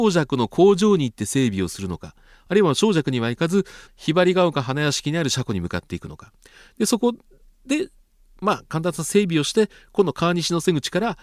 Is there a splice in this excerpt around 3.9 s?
yes; 1 cut; at 3.9 s

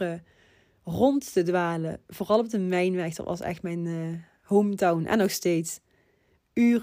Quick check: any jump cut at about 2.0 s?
no; 0 cuts

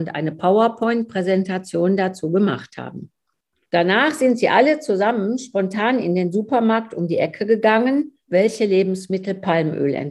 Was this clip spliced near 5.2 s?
no; 2 cuts; at 3.6 s, 8.3 s

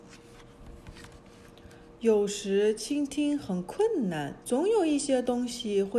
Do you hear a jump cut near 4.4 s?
yes; 1 cut; at 4.4 s

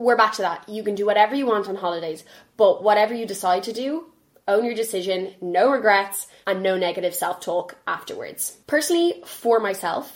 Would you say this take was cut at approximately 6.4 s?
yes; 1 cut; at 6.4 s

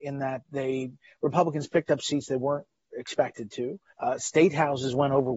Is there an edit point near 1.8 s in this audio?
no; 1 cut; at 3.9 s

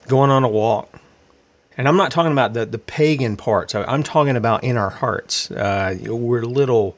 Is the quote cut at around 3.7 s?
no; 1 cut; at 1.7 s

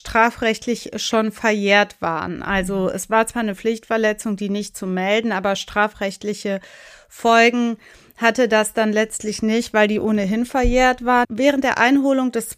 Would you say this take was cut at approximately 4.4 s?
no; 1 cut; at 11.2 s

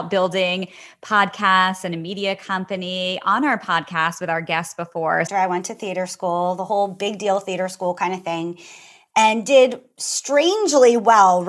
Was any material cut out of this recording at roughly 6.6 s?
no; 1 cut; at 5.3 s

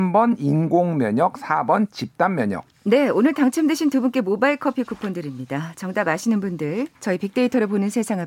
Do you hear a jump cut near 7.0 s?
yes; 1 cut; at 7.0 s

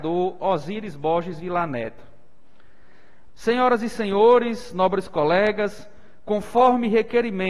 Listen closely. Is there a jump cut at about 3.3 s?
yes; 1 cut; at 3.3 s

